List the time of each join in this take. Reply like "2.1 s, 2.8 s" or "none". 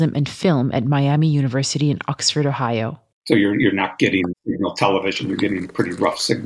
3.1 s, 4.3 s